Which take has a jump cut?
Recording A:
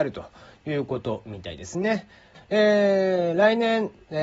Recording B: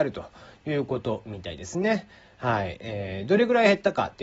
A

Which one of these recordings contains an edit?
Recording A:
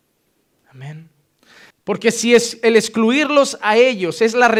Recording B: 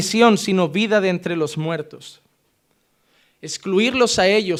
A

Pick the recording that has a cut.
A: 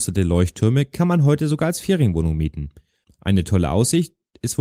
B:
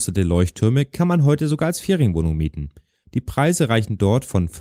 A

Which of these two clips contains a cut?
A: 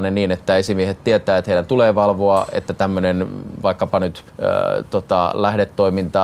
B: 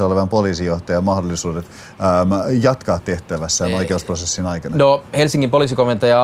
A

